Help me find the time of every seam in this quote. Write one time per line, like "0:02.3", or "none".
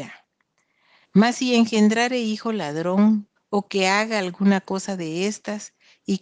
0:01.0
0:03.4